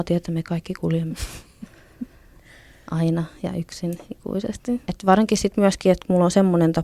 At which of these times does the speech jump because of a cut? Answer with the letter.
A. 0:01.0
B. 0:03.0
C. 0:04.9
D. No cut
C